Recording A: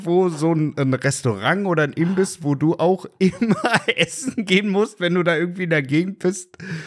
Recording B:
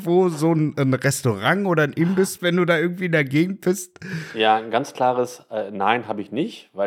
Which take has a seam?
B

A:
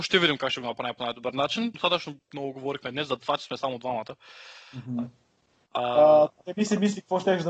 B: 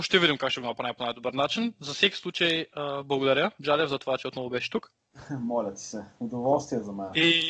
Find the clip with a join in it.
A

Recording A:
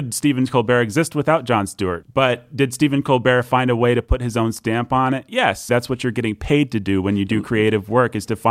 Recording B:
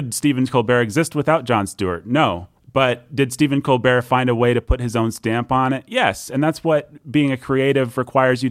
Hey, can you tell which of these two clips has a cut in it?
A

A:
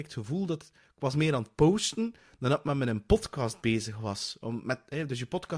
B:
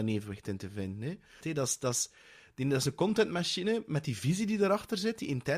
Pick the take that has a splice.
B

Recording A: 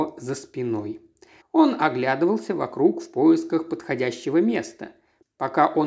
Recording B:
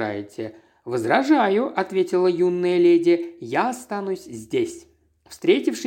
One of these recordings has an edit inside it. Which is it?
A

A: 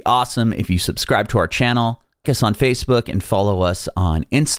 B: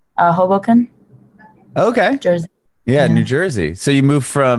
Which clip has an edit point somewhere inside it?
A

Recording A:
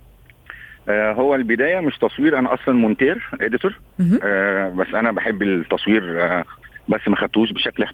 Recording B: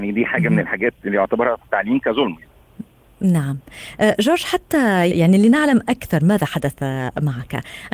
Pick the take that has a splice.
B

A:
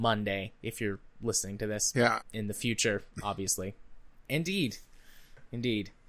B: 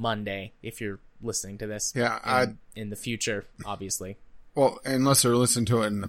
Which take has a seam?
A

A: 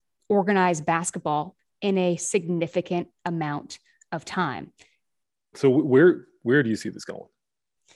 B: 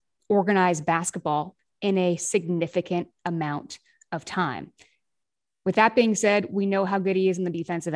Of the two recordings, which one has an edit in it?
A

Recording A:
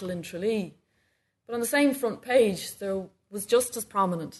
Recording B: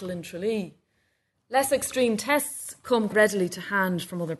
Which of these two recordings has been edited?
B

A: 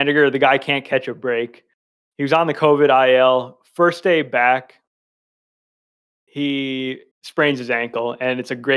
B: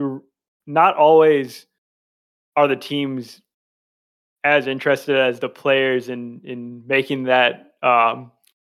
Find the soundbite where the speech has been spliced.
A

